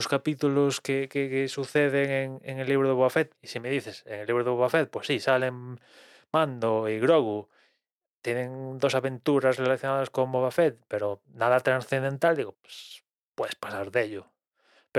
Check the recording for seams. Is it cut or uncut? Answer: cut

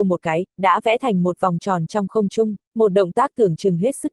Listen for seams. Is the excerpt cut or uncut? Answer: cut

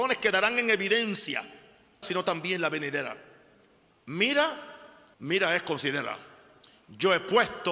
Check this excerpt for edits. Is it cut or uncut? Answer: cut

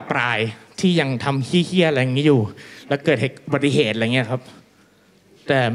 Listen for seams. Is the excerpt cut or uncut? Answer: uncut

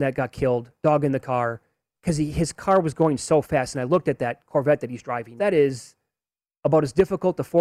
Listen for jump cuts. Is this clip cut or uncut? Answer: cut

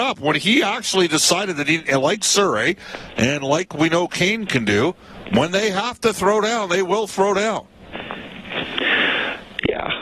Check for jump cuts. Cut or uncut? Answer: uncut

